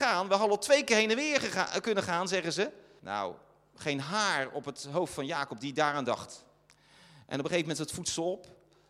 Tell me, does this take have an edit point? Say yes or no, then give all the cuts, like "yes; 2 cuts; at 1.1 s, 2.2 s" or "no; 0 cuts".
yes; 1 cut; at 3.0 s